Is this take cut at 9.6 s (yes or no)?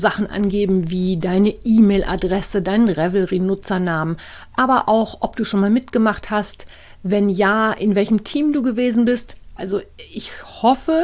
yes